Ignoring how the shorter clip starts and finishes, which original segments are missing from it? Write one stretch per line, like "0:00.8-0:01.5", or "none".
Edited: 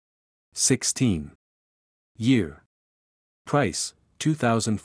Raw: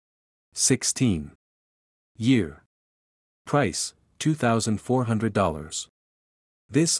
none